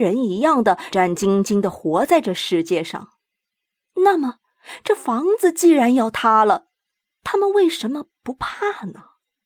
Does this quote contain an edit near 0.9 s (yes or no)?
yes